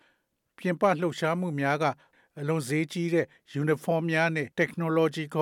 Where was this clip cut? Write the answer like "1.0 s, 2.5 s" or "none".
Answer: 4.5 s